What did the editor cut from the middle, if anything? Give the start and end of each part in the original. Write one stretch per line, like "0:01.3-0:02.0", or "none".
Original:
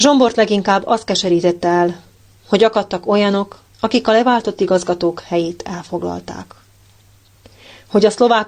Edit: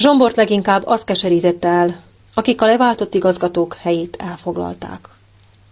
0:02.2-0:03.7